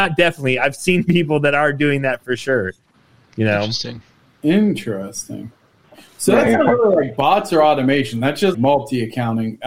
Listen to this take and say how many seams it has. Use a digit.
1